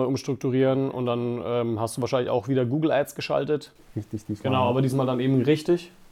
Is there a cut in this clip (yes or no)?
no